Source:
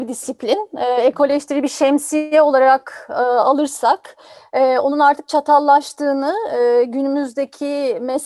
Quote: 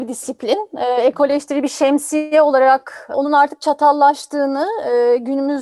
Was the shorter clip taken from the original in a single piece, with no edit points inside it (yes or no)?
no